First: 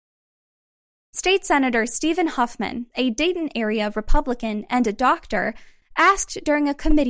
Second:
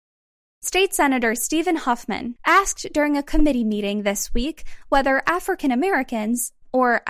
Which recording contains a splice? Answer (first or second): second